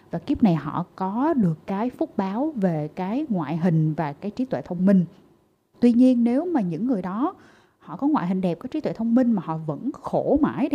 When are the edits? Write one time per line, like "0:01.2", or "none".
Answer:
none

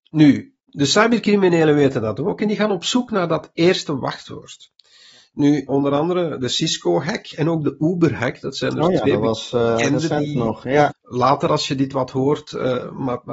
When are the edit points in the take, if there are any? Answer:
0:05.7
0:10.9

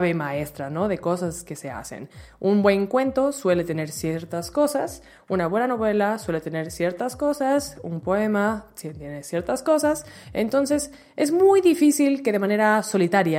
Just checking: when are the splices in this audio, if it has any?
none

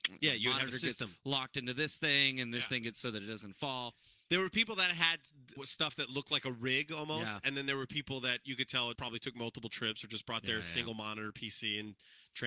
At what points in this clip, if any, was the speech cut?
0:05.6
0:08.9

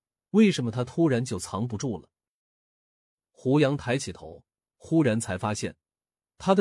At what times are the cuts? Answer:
0:04.7

